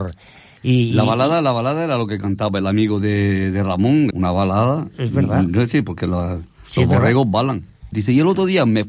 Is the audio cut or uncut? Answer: cut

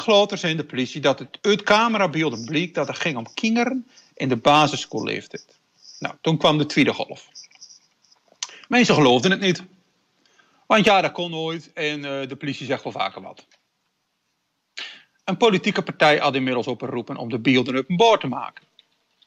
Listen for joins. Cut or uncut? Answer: uncut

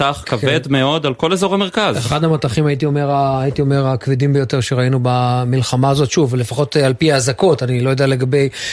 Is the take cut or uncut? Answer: uncut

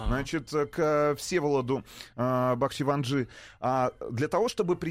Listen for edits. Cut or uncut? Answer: uncut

